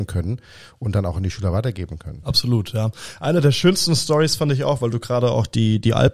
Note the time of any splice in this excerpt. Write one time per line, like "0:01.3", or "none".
none